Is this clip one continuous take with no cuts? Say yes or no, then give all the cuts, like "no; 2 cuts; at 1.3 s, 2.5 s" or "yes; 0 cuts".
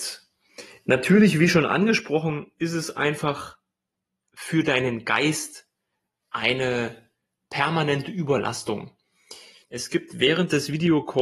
no; 1 cut; at 9.6 s